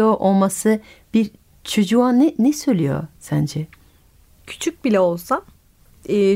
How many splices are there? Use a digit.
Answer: 0